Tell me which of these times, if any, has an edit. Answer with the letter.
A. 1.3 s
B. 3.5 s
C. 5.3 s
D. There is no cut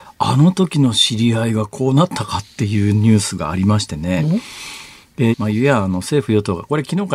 C